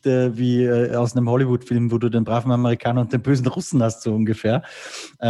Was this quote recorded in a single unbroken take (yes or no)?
yes